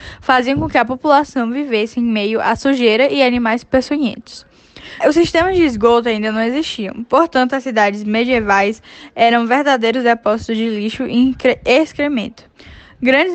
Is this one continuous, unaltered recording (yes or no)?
no